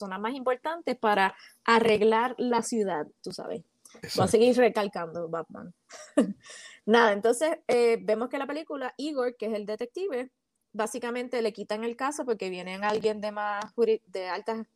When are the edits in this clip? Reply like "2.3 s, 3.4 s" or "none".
3.2 s